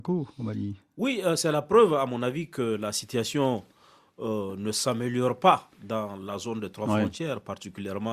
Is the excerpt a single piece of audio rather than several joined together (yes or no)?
yes